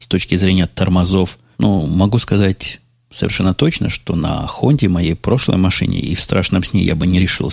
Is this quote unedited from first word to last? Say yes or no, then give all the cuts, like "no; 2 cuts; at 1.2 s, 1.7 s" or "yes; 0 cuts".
no; 1 cut; at 1.5 s